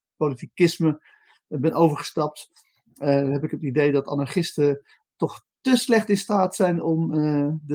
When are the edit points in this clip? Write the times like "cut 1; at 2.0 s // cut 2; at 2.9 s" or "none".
none